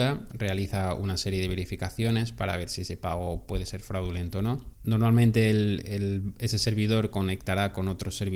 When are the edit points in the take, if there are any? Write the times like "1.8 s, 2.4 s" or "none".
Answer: 4.7 s